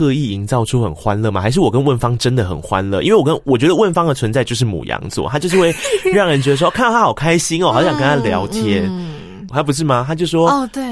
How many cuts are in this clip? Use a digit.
1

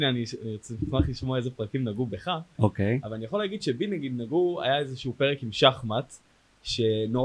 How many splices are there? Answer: 0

